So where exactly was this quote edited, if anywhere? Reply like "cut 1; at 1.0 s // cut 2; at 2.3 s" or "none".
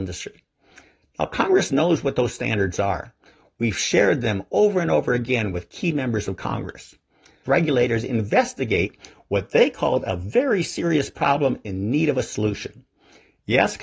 cut 1; at 7.5 s